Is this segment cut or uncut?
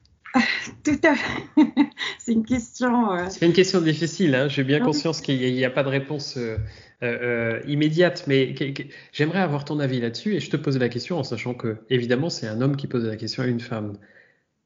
uncut